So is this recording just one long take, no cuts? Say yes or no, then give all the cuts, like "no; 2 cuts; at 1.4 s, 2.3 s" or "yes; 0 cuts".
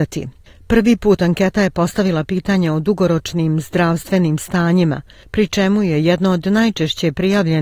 yes; 0 cuts